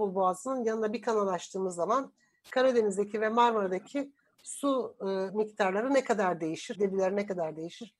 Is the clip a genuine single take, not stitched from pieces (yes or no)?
no